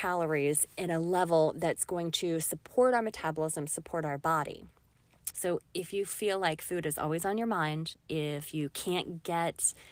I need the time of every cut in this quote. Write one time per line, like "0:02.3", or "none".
0:05.3